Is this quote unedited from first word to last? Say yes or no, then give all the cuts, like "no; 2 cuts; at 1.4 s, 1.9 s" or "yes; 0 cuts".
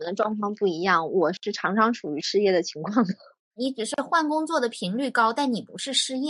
yes; 0 cuts